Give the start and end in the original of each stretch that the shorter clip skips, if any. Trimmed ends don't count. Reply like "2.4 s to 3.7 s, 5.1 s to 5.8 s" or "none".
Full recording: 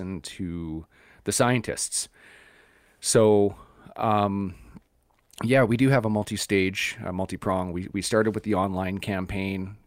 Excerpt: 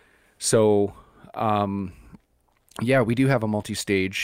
none